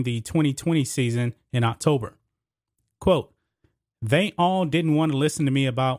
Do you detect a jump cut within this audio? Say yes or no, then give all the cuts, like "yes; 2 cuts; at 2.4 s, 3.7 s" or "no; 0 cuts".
no; 0 cuts